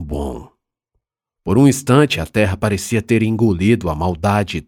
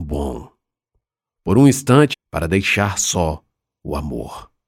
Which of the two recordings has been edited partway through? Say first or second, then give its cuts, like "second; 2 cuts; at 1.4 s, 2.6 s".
second; 1 cut; at 2.1 s